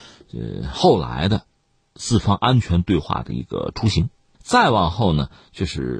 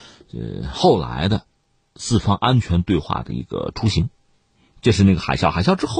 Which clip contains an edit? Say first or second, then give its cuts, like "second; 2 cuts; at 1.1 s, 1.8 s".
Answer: first; 1 cut; at 4.3 s